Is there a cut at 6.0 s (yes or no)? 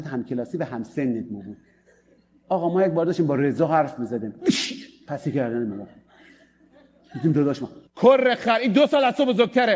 no